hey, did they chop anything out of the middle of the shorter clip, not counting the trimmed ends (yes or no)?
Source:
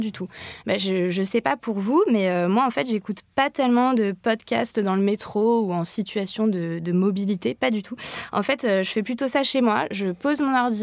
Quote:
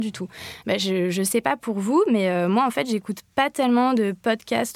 no